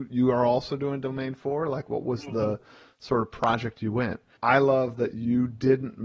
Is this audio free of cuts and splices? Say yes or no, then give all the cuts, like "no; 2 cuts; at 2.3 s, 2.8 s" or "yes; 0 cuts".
no; 1 cut; at 4.4 s